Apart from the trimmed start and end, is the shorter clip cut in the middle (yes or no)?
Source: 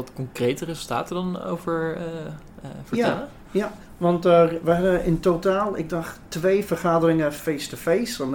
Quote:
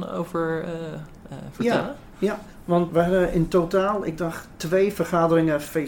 yes